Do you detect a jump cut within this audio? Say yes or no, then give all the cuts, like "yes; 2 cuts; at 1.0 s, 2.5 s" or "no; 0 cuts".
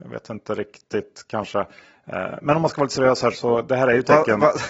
yes; 1 cut; at 3.3 s